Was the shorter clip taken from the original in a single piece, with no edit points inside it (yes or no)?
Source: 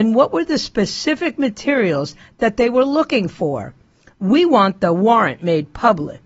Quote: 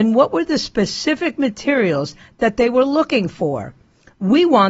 yes